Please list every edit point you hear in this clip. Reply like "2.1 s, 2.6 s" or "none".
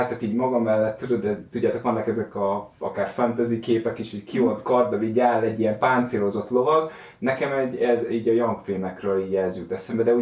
none